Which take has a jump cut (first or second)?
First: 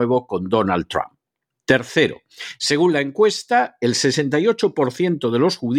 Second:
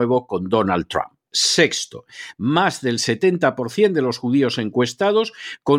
second